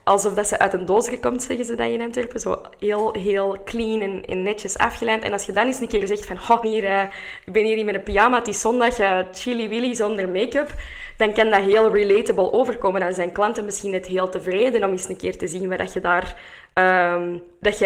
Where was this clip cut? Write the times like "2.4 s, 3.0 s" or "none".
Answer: 6.6 s